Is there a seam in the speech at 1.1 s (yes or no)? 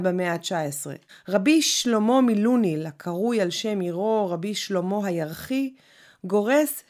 yes